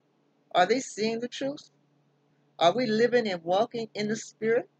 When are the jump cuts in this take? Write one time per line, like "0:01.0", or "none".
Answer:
none